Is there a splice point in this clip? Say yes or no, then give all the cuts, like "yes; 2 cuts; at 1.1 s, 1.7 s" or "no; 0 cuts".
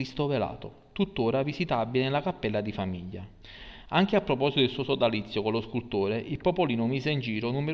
no; 0 cuts